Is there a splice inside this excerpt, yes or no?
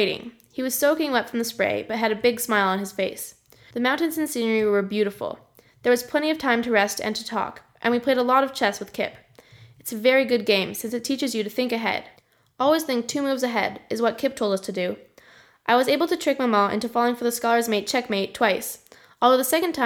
yes